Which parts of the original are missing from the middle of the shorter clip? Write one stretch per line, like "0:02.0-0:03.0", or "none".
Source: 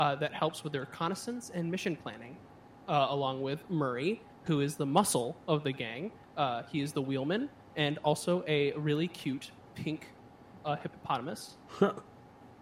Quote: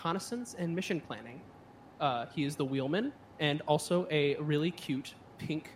0:02.9-0:06.3